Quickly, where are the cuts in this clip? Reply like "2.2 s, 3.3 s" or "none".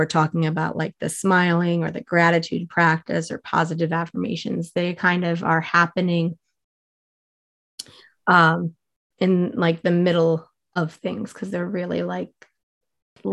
none